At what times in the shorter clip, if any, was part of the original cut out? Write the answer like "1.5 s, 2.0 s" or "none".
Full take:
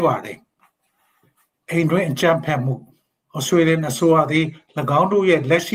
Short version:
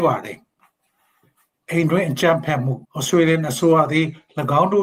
2.8 s

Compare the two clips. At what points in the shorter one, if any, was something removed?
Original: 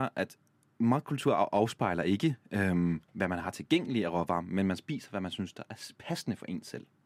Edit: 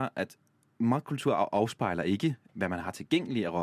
2.5 s

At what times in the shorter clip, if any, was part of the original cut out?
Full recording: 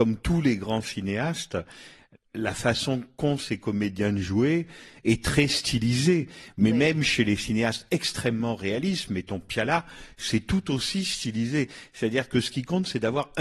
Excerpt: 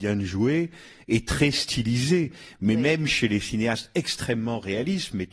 none

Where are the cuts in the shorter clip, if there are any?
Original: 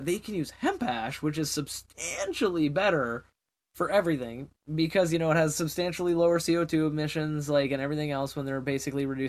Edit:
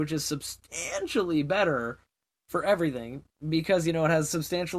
none

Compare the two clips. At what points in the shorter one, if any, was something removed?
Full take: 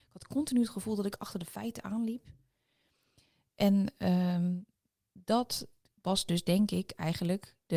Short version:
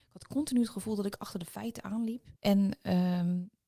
2.4 s

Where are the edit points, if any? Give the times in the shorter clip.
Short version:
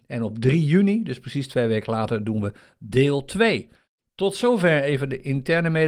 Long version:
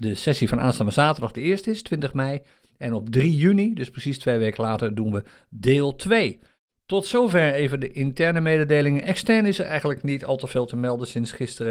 none

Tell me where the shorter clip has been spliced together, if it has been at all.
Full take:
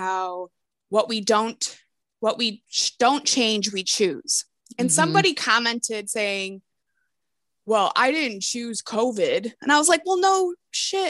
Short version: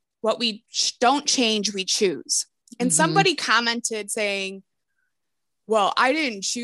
none

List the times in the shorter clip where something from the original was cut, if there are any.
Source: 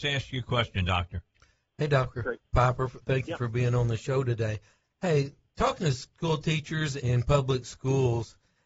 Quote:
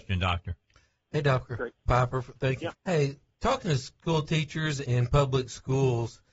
2.7 s

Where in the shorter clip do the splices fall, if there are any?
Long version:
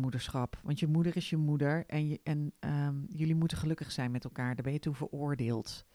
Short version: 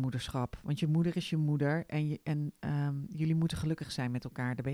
none

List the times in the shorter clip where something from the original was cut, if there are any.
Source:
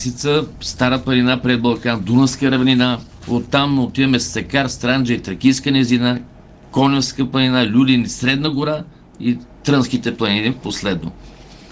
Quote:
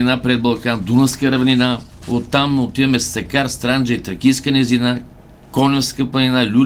none

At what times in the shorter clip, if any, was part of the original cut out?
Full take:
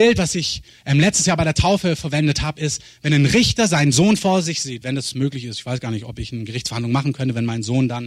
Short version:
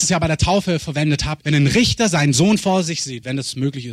1.4 s

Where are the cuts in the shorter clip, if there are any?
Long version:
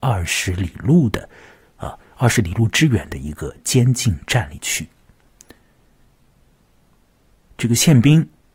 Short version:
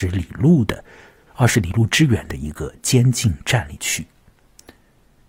1.3 s

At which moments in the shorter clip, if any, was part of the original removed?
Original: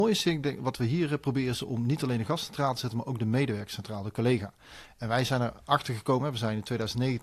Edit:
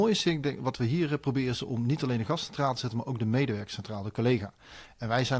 none

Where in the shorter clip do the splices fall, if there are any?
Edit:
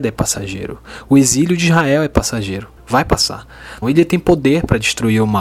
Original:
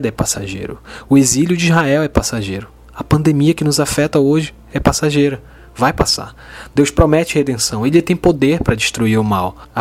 2.8 s, 3.8 s

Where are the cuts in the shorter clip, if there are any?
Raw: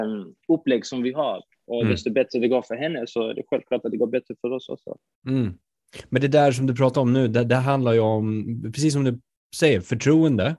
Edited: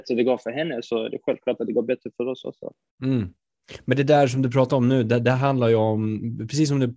none

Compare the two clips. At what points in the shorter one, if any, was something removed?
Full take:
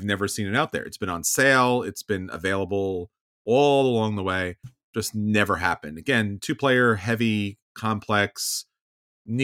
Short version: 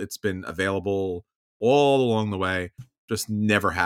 none

